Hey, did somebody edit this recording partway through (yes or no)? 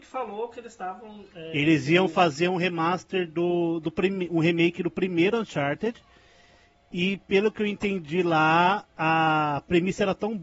no